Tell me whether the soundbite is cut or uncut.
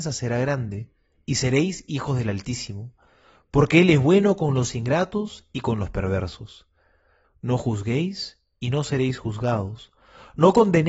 cut